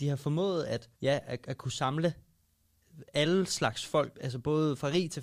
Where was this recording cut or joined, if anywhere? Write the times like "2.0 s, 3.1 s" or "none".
0.9 s, 4.1 s